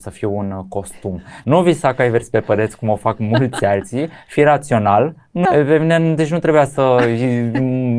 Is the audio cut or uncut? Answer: cut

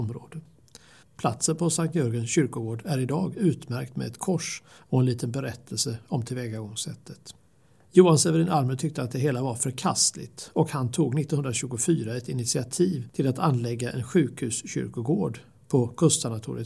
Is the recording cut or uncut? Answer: cut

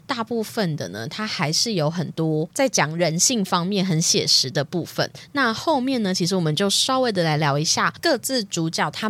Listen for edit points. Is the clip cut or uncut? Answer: uncut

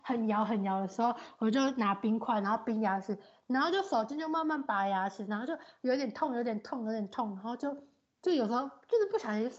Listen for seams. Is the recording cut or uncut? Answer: uncut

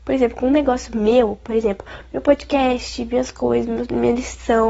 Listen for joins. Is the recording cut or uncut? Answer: uncut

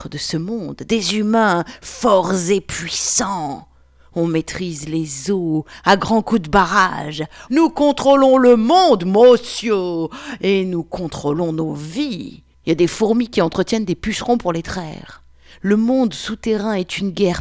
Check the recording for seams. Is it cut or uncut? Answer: cut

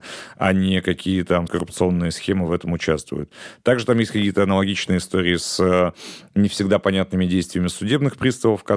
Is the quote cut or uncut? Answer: cut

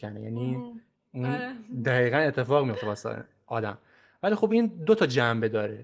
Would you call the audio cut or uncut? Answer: uncut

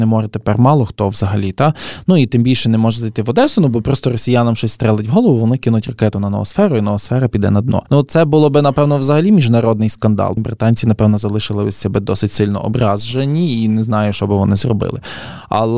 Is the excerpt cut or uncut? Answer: cut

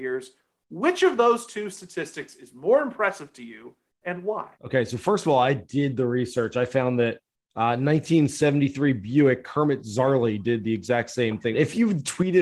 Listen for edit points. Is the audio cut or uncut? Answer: cut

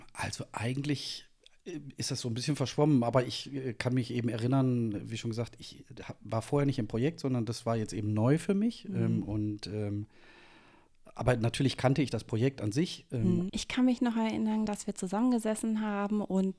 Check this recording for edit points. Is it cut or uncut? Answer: cut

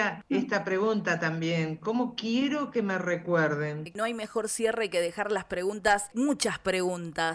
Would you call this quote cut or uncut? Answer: uncut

